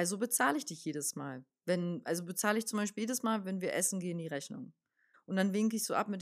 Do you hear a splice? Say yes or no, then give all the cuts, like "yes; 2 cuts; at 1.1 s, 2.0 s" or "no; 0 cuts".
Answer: yes; 1 cut; at 5.1 s